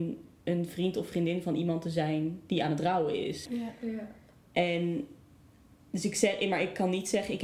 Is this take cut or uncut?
cut